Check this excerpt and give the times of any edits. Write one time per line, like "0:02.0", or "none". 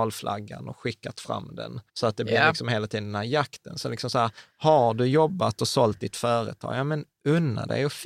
0:01.9